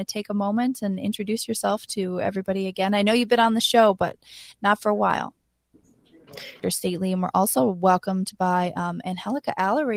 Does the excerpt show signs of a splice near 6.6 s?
yes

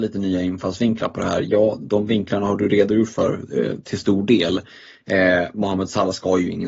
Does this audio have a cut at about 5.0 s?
no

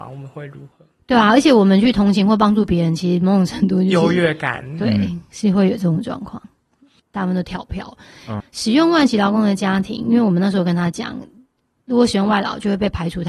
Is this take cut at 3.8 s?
no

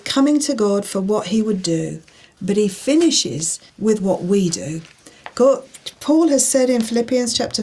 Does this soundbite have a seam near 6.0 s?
no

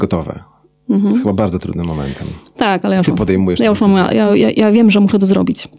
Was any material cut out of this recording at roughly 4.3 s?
no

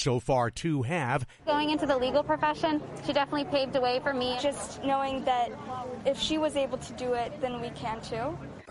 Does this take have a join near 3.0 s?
no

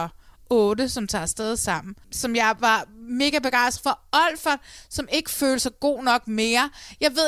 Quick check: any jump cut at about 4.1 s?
no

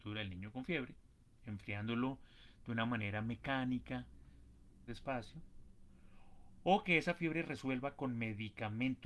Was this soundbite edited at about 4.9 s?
yes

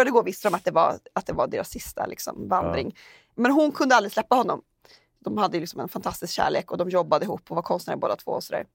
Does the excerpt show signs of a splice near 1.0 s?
no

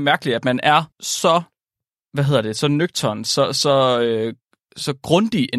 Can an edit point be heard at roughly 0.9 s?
yes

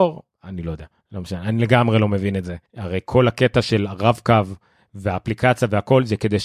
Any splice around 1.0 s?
yes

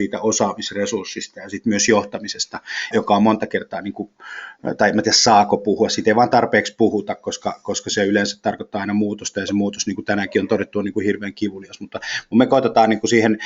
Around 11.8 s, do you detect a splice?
no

